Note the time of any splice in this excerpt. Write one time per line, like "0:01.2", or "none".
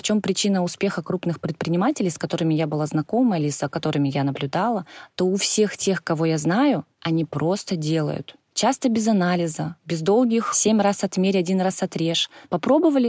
none